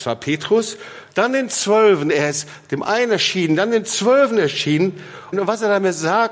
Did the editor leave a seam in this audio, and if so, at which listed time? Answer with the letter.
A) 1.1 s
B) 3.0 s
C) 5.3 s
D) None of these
C